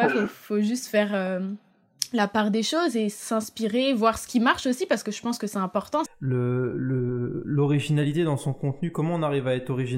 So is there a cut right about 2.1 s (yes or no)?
no